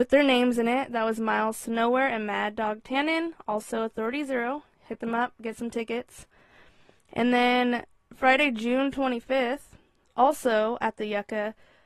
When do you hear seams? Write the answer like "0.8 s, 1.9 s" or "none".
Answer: none